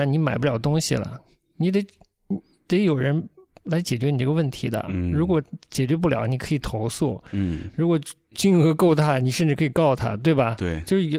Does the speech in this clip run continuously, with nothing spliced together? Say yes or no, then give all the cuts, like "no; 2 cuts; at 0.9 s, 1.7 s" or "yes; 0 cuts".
yes; 0 cuts